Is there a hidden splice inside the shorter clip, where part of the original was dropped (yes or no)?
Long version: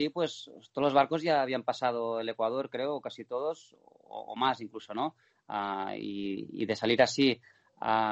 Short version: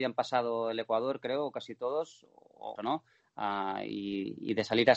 yes